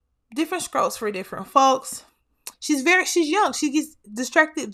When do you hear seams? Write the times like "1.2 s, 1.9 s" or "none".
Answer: 2.5 s